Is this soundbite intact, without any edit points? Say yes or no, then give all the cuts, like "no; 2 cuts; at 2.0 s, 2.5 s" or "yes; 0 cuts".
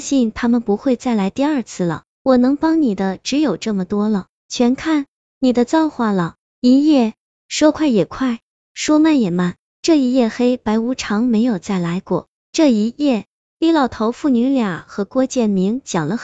yes; 0 cuts